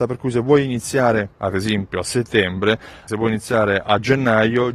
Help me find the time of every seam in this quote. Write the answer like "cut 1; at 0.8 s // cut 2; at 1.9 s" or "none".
cut 1; at 3.1 s